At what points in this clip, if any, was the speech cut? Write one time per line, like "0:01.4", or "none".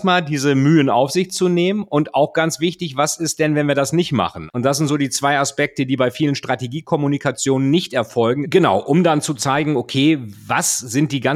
0:04.5
0:08.4